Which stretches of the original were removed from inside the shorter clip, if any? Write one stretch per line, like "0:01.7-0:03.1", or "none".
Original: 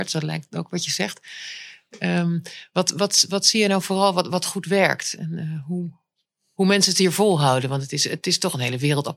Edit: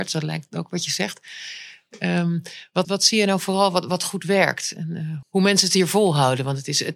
0:02.8-0:03.3
0:05.6-0:06.5